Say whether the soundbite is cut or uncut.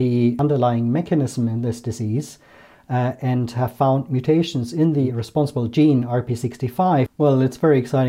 cut